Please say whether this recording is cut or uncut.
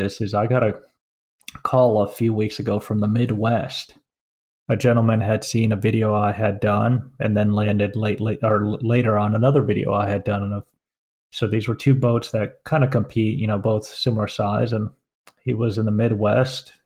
uncut